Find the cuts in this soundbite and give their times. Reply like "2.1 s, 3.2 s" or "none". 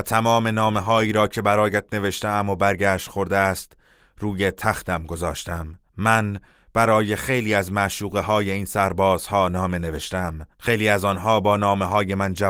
5.9 s, 10.5 s